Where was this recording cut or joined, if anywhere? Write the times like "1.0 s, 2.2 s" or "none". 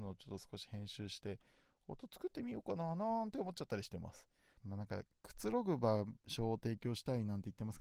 4.6 s